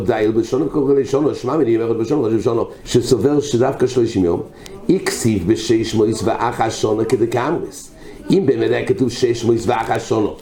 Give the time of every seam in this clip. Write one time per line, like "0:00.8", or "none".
0:02.8